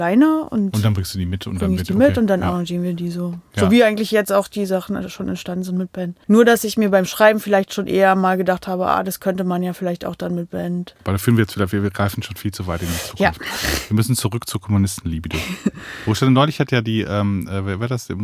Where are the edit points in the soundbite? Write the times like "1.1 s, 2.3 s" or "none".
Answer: none